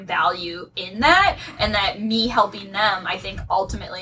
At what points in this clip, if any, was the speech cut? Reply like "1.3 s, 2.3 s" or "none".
none